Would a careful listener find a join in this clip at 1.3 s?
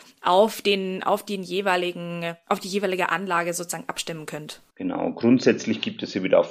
no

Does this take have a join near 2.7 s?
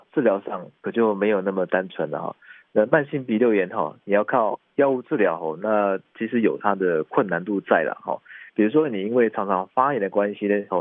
no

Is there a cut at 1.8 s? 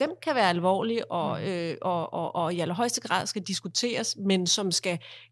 no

